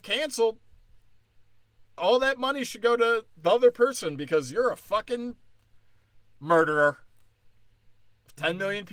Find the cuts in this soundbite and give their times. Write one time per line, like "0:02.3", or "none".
0:02.0